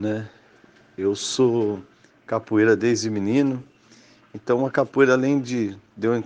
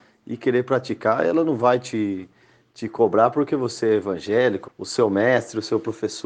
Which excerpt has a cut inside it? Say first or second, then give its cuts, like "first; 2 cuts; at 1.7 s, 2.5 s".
second; 1 cut; at 4.6 s